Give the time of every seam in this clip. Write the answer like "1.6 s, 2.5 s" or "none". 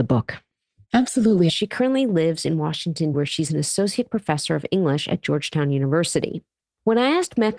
1.5 s, 3.1 s

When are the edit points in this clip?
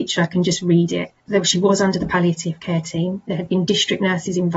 1.2 s

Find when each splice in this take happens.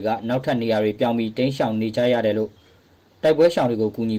none

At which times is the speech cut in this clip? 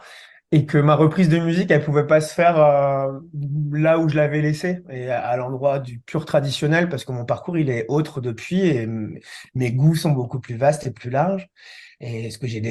none

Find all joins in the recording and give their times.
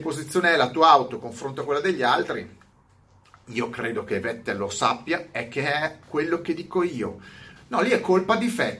7.6 s

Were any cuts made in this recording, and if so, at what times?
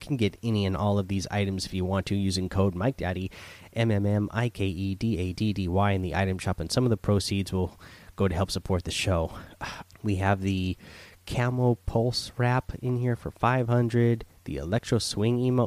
9.8 s

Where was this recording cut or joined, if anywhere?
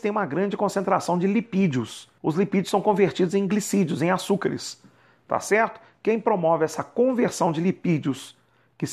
2.2 s

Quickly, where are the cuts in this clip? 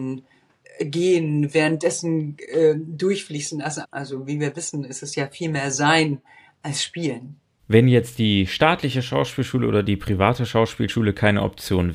3.8 s, 7.6 s

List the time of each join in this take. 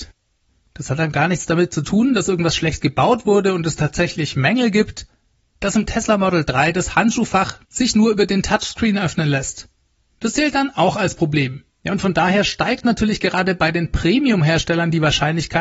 5.6 s, 11.8 s

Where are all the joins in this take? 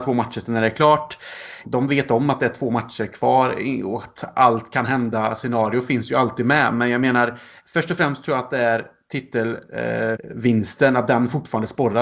1.6 s, 10.2 s

